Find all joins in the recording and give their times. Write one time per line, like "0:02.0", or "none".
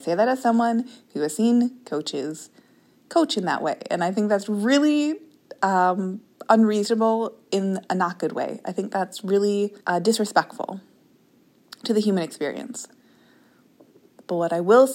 0:09.8